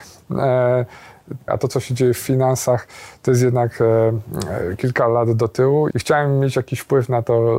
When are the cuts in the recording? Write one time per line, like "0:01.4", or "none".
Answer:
0:01.5
0:05.9